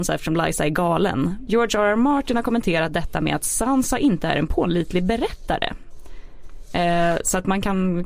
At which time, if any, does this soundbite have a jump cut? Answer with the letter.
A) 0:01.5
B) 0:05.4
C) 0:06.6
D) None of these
A